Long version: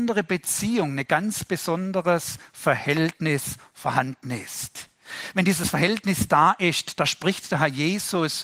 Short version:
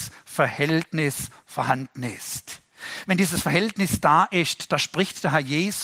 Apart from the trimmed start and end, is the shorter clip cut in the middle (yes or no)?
no